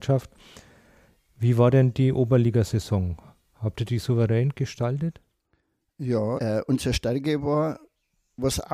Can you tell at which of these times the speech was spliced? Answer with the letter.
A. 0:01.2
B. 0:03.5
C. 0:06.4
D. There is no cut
C